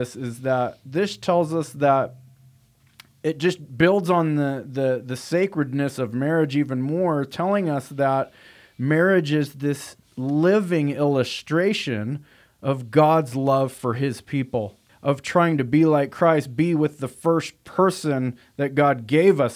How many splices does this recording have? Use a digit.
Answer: 1